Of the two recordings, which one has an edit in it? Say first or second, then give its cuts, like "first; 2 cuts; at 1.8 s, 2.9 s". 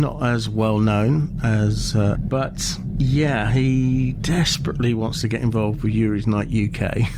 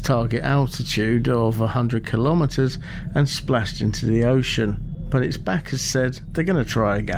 first; 1 cut; at 2.2 s